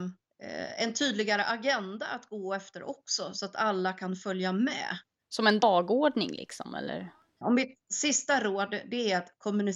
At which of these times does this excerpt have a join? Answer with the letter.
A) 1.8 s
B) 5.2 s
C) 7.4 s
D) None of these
C